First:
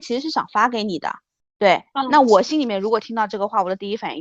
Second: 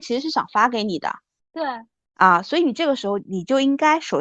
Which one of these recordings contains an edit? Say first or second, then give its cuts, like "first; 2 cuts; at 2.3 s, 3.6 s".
second; 1 cut; at 1.4 s